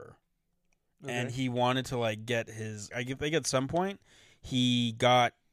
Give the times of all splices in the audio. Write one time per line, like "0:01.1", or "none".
0:02.9